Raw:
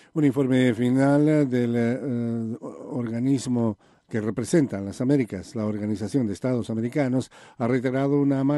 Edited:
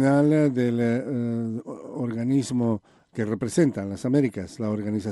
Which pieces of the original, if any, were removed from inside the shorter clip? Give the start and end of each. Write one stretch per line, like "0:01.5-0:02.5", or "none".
none